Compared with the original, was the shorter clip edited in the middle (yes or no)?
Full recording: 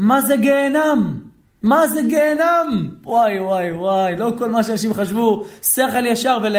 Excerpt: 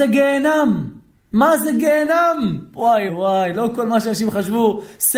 yes